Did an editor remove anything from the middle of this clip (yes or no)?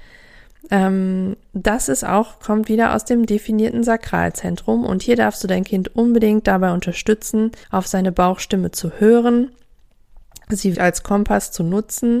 yes